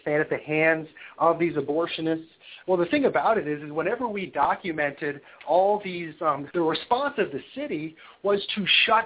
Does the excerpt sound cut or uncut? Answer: cut